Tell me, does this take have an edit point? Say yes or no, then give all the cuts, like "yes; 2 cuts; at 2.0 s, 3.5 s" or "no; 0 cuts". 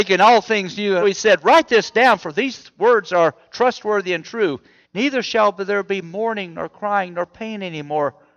yes; 2 cuts; at 1.0 s, 4.8 s